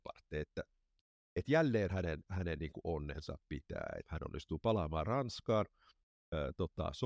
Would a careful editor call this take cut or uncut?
cut